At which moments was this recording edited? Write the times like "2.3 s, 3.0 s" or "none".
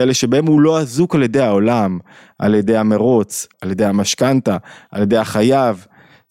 3.5 s